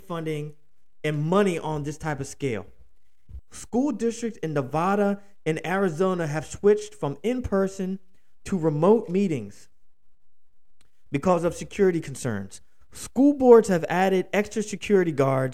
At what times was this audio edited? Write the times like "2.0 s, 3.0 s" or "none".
3.4 s